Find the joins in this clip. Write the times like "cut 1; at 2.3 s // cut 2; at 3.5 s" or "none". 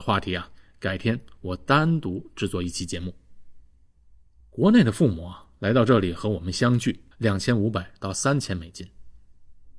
cut 1; at 7.1 s